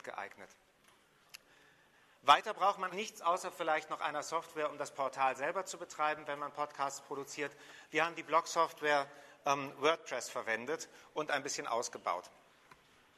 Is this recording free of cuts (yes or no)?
no